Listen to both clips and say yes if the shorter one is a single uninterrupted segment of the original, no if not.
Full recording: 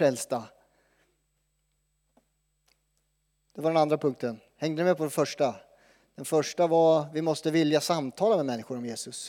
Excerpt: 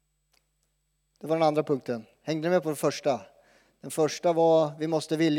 yes